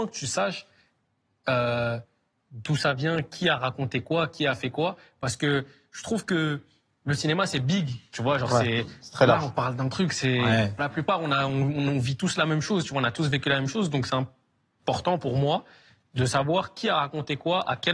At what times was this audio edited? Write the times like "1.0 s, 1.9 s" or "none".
10.8 s